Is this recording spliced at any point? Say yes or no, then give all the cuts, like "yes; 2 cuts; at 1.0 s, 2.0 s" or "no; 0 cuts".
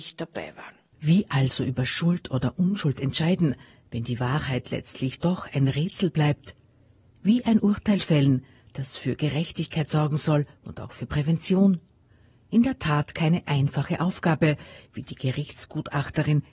no; 0 cuts